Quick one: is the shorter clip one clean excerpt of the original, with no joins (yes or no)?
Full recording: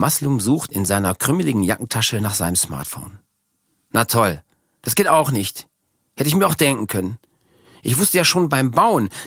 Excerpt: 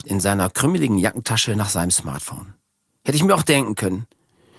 no